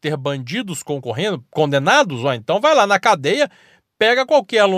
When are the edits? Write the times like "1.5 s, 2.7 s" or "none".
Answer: none